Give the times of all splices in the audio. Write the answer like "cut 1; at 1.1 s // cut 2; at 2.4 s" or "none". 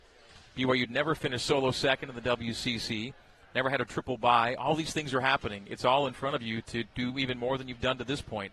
none

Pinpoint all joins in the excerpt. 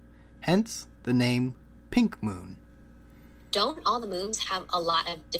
none

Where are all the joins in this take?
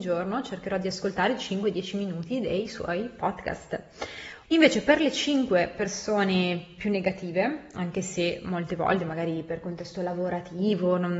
cut 1; at 4.4 s

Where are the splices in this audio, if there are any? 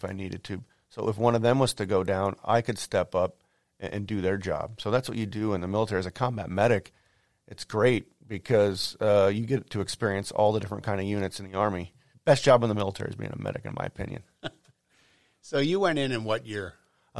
cut 1; at 12.1 s

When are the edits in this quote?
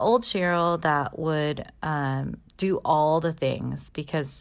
cut 1; at 2.5 s

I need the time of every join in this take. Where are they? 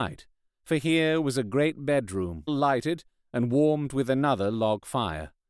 cut 1; at 2.5 s

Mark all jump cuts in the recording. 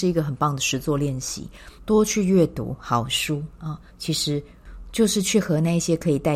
cut 1; at 1.8 s // cut 2; at 3.9 s

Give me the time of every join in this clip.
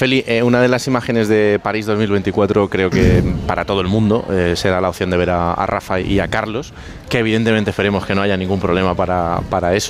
cut 1; at 6.0 s

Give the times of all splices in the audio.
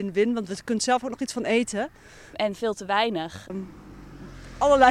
cut 1; at 2.3 s // cut 2; at 3.5 s

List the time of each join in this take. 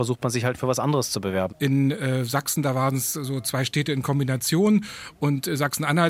cut 1; at 1.5 s

